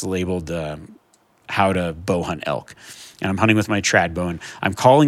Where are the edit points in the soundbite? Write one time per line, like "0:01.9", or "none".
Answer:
none